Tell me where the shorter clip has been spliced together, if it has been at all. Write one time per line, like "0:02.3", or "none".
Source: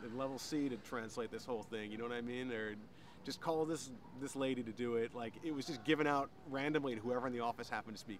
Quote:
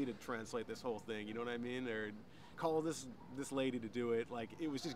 0:02.6